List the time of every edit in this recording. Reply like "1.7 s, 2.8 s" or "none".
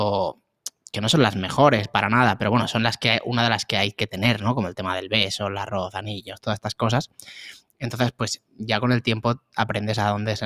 none